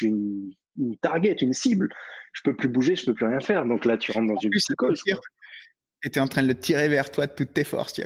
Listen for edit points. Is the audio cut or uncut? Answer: uncut